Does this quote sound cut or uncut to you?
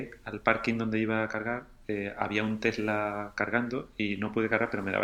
uncut